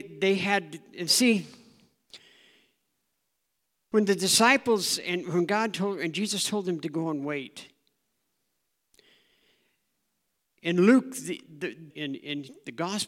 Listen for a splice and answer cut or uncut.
cut